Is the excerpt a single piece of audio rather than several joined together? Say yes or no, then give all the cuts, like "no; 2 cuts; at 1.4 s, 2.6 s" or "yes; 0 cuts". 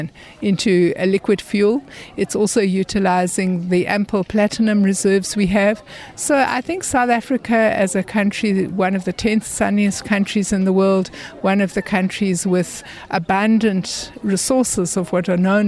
yes; 0 cuts